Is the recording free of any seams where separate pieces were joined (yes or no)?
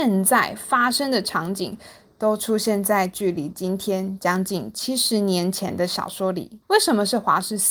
no